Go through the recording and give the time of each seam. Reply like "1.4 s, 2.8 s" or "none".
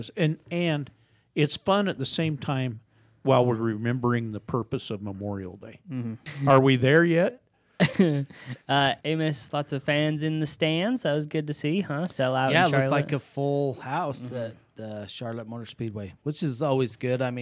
6.3 s, 9.0 s